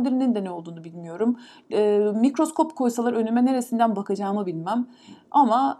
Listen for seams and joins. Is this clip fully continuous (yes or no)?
yes